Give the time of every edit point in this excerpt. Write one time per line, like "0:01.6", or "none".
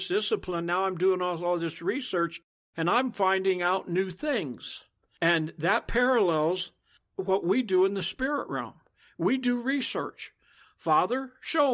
none